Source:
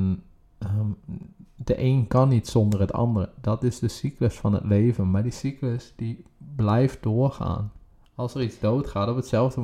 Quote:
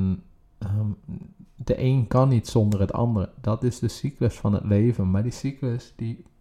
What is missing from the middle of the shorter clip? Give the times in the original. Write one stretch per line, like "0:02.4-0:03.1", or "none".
none